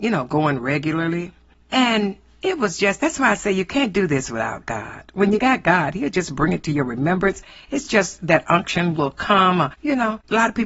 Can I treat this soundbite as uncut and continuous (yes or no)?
yes